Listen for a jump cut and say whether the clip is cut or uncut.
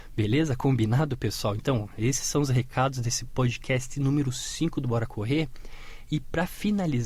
uncut